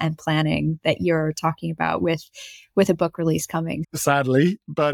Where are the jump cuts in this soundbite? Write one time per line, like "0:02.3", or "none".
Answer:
0:03.8